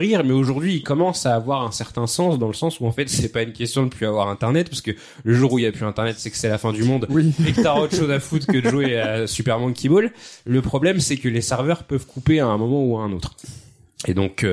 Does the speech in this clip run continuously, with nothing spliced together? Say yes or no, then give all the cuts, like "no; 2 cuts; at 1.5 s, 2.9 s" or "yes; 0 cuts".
yes; 0 cuts